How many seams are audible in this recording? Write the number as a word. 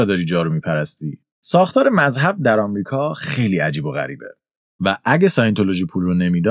two